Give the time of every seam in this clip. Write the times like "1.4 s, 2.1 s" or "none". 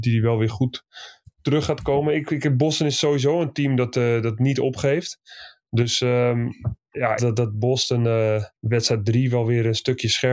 7.2 s, 8.6 s